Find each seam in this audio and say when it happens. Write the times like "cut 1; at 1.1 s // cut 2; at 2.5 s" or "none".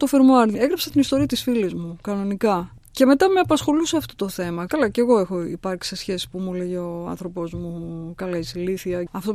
cut 1; at 4.7 s